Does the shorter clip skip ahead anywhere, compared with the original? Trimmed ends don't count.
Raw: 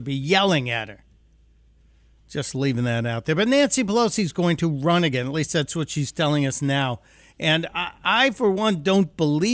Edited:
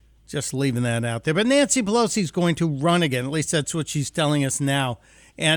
no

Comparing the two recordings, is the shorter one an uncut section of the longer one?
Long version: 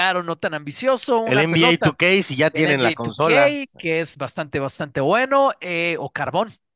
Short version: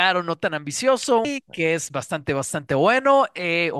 no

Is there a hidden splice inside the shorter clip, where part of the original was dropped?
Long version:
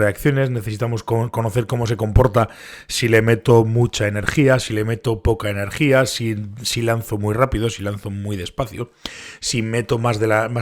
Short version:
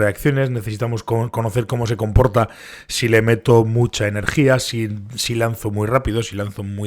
yes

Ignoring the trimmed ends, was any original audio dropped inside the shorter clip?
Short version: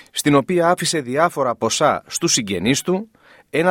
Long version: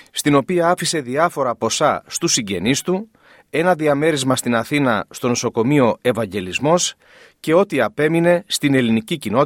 no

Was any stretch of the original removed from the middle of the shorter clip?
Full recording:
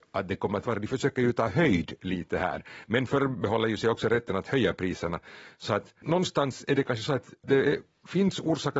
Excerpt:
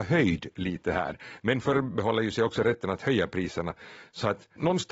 no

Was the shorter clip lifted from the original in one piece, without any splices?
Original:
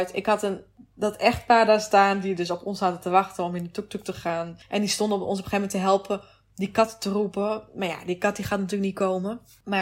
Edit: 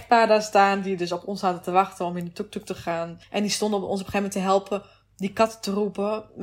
yes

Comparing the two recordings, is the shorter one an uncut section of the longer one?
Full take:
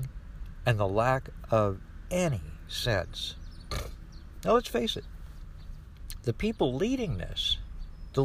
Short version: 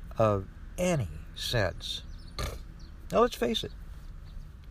yes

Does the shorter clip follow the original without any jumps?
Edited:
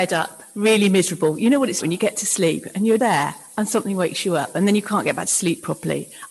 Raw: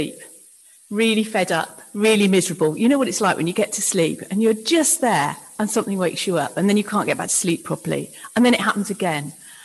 no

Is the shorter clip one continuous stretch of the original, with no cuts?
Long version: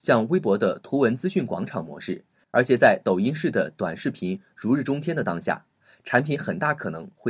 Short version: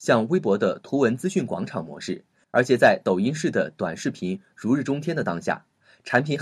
yes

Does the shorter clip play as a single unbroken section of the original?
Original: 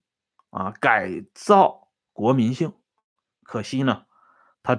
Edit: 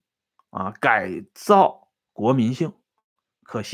yes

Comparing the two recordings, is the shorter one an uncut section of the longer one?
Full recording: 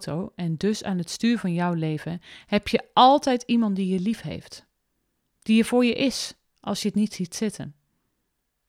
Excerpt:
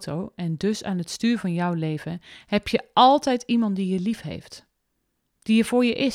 yes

